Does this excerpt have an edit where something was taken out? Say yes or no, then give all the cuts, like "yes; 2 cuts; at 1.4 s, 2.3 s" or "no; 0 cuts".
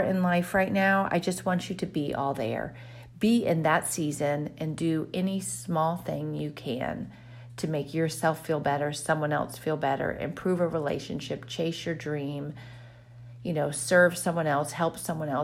no; 0 cuts